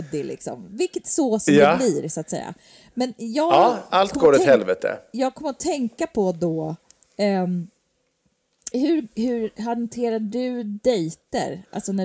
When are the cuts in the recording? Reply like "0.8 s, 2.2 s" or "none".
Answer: 8.7 s